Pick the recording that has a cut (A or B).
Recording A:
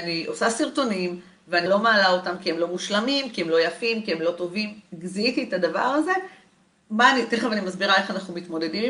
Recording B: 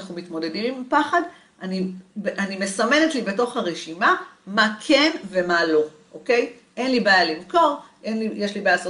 A